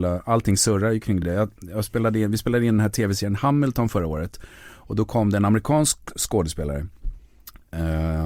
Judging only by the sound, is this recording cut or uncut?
uncut